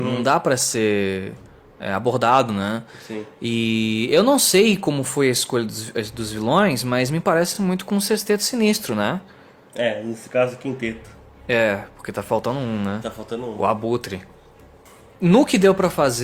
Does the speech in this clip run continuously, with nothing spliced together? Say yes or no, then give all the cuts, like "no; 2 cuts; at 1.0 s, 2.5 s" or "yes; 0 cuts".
yes; 0 cuts